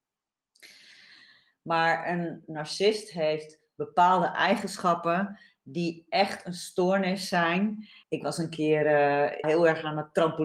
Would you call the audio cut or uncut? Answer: cut